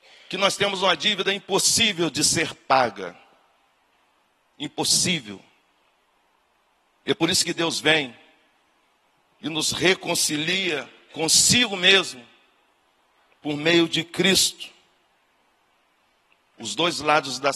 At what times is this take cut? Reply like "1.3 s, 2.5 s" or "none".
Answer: none